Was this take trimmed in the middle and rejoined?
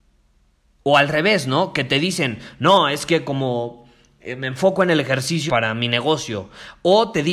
yes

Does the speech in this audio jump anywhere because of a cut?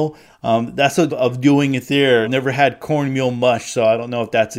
yes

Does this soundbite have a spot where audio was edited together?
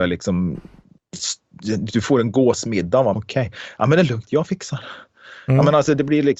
yes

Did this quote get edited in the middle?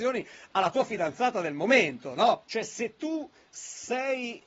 yes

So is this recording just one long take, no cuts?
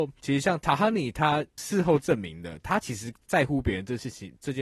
yes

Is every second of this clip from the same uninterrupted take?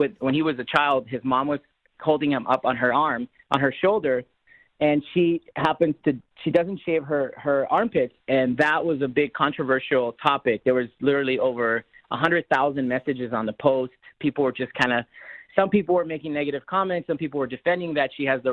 yes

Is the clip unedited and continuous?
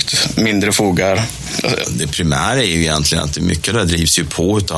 no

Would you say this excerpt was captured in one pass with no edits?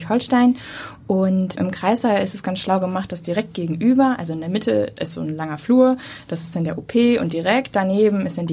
no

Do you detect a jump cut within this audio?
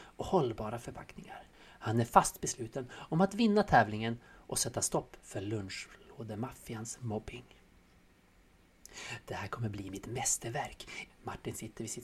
yes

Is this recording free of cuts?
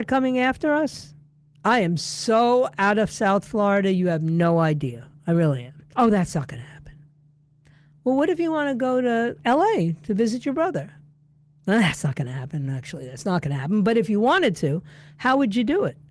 no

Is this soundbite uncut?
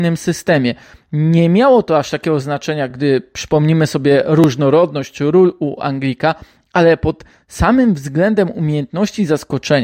yes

